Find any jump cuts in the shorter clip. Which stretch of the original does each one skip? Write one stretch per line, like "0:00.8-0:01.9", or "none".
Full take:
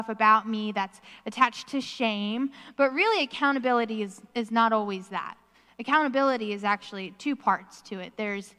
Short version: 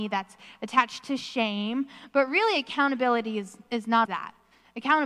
0:04.7-0:05.1